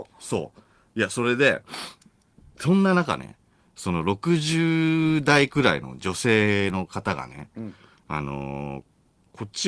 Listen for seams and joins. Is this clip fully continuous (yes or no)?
yes